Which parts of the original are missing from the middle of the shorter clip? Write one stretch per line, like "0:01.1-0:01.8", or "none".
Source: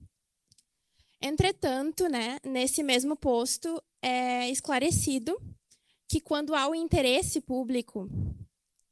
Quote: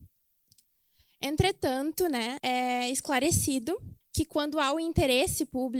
0:02.4-0:04.0
0:05.6-0:06.0